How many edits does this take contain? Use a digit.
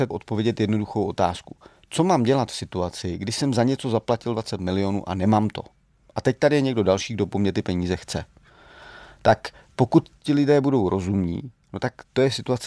0